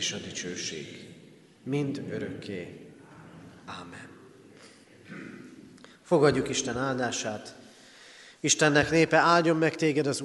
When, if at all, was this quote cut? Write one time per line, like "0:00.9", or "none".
none